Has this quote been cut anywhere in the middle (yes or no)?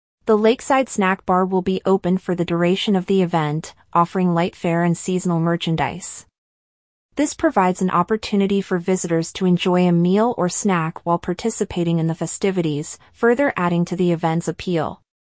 no